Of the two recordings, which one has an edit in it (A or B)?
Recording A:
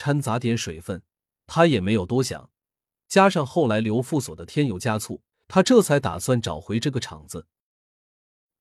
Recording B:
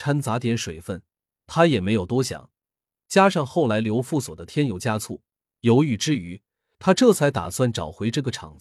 A